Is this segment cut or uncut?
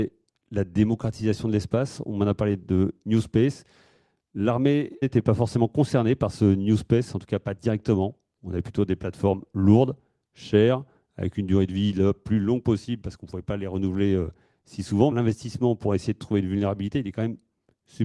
cut